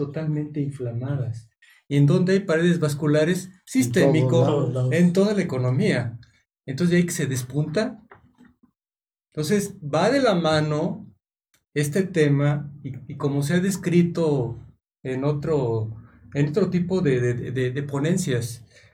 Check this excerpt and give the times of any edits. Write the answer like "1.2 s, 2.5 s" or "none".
none